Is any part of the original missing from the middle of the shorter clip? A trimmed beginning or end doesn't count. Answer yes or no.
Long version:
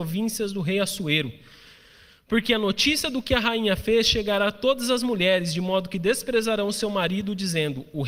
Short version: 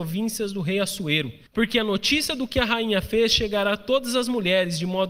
yes